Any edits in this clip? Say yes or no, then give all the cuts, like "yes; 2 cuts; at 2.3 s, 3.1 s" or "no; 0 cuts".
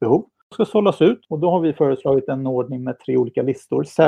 no; 0 cuts